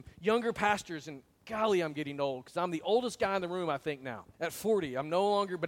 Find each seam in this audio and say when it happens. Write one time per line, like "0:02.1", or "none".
0:04.3